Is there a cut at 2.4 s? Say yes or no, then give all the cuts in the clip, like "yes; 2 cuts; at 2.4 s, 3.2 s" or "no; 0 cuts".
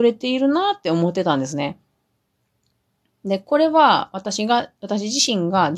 no; 0 cuts